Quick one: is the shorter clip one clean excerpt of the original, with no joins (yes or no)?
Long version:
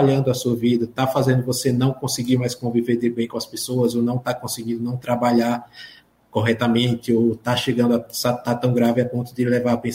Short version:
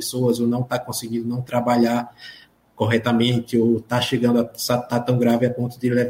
yes